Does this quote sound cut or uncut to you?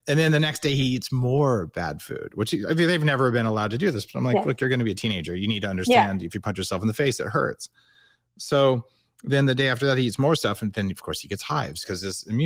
uncut